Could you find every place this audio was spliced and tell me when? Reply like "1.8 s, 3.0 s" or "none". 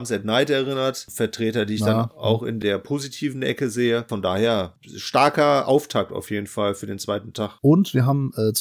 7.6 s